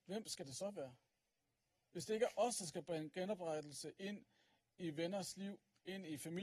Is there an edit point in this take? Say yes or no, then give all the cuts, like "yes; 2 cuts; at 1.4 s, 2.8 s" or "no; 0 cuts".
no; 0 cuts